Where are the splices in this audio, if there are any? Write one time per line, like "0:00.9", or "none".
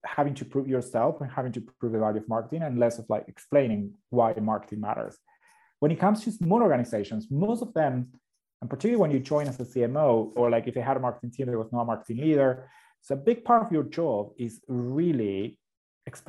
0:10.4

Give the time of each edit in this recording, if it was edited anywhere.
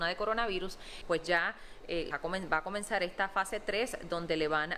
0:01.0
0:02.1

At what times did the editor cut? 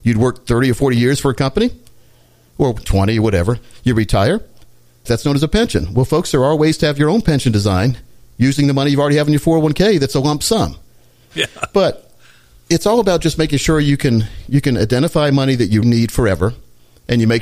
0:05.1
0:11.3
0:15.8

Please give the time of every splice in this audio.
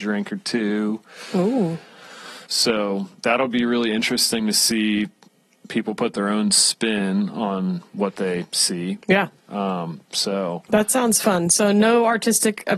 0:02.5

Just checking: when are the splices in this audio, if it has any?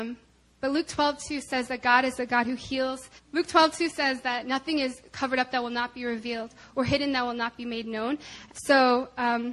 0:03.2
0:08.5

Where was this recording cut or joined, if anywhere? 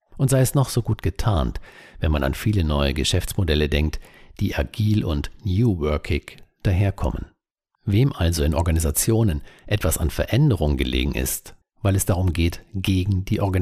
0:07.8
0:11.6

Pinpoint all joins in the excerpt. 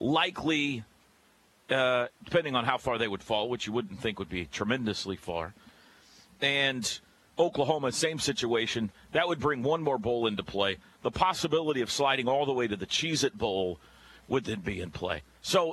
0:02.1

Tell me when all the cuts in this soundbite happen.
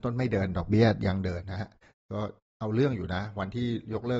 0:01.4

